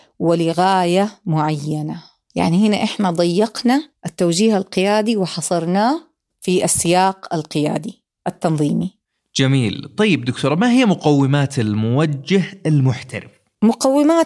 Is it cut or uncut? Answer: uncut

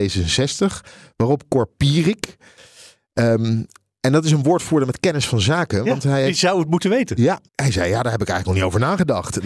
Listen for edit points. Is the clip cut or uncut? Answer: cut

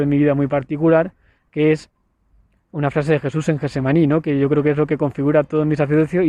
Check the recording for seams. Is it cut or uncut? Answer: uncut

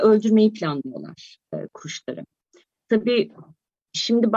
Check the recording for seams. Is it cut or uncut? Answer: uncut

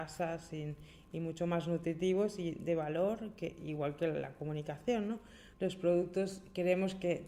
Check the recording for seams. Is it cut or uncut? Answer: cut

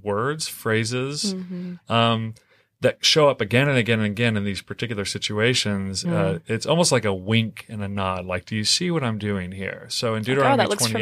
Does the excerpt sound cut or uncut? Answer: cut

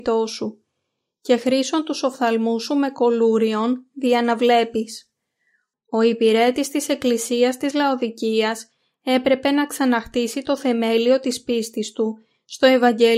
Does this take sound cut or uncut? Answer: cut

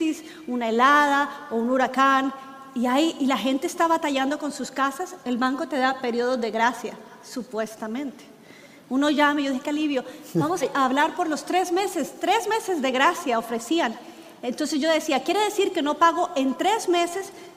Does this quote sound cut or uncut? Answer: cut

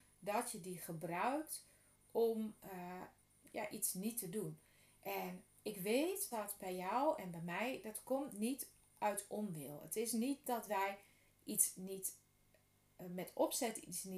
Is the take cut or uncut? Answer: cut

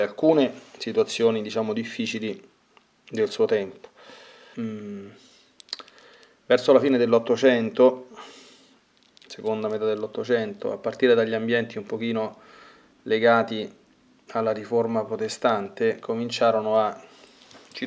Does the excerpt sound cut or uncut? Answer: cut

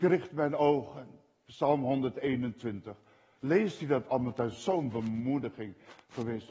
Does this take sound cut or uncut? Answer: uncut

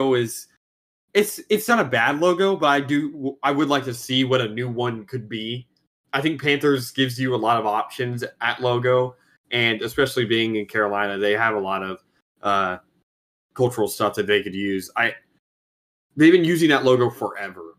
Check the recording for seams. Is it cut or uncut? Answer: uncut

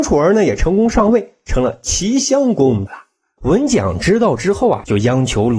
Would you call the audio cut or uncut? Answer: cut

